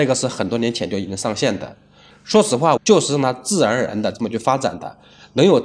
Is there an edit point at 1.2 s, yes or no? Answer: no